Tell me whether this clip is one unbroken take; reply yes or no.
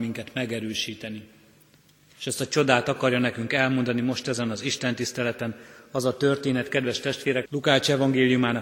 no